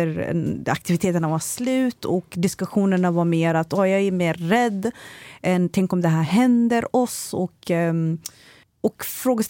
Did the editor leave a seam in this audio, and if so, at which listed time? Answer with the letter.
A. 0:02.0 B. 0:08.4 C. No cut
C